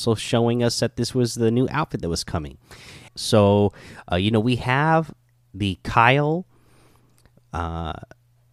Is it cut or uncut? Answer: cut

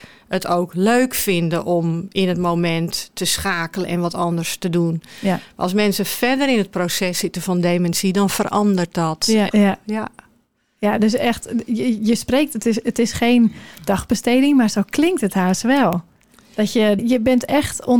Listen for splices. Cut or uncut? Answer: cut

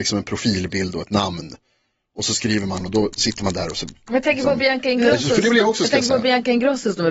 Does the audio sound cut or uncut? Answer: uncut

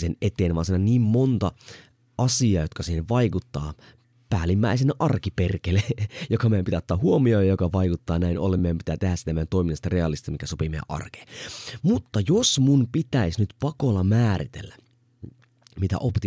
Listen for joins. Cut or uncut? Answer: uncut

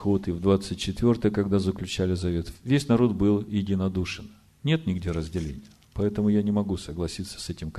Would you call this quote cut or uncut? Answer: cut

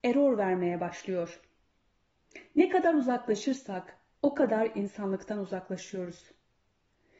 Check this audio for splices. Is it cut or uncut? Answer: uncut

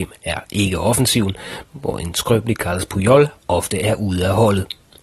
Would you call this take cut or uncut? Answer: cut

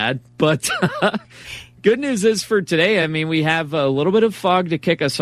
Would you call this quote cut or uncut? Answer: uncut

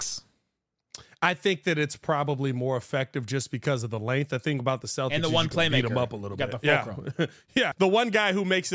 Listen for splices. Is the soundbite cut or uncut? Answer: cut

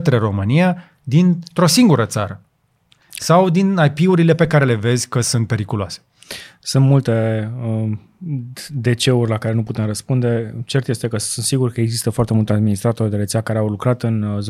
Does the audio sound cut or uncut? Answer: uncut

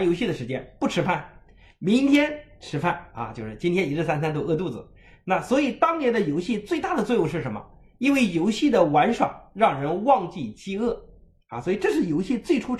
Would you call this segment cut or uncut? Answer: uncut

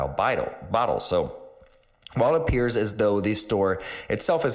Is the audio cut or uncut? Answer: uncut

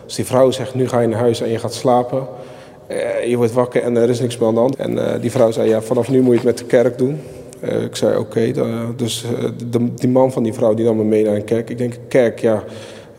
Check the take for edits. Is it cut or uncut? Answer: cut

